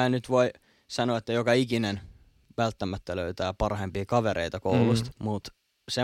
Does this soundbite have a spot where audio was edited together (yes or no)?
yes